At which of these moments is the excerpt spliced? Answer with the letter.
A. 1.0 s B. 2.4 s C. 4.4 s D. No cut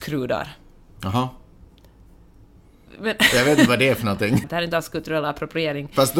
C